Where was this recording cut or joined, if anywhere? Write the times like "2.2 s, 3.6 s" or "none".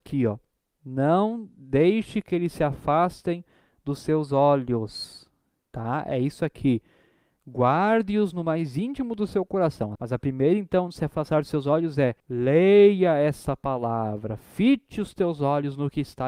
10.0 s, 12.2 s